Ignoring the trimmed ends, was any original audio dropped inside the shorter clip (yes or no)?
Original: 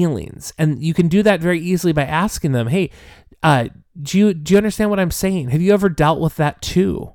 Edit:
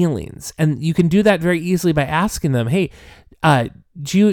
no